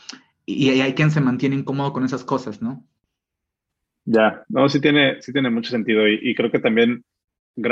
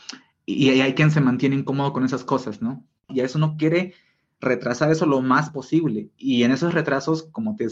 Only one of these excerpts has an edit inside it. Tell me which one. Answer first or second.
second